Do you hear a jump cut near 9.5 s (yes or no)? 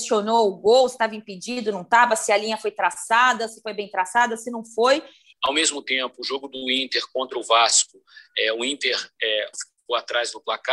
yes